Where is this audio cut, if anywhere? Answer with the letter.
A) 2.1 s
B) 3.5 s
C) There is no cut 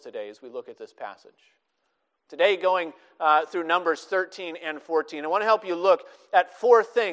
C